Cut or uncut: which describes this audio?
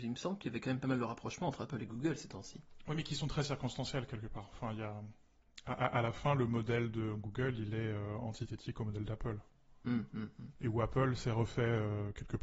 uncut